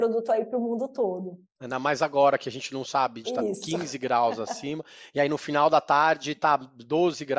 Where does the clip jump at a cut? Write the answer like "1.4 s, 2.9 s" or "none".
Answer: 3.2 s